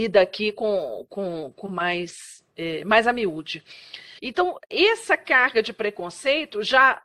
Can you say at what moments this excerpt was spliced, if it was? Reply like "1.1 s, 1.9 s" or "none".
4.2 s